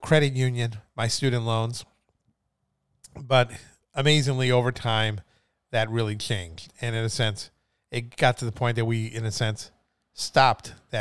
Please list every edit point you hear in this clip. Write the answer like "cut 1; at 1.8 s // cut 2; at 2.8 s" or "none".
none